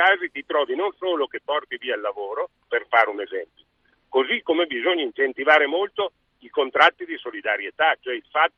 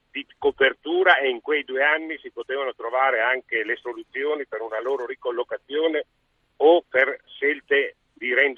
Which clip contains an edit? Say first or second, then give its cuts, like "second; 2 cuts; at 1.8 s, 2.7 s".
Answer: first; 1 cut; at 2.6 s